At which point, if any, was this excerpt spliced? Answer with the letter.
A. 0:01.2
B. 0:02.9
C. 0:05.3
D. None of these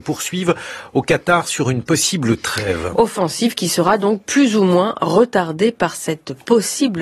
B